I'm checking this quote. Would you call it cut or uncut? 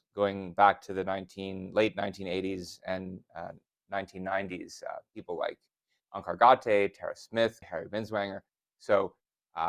cut